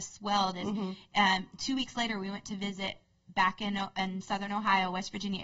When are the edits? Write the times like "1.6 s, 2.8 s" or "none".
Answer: none